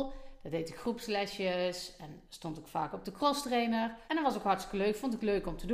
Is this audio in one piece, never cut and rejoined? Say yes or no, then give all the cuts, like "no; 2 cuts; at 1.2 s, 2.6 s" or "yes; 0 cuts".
no; 1 cut; at 4.1 s